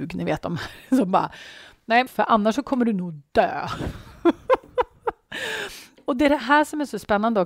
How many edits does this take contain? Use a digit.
1